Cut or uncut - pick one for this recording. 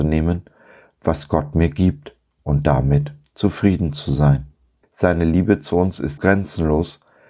cut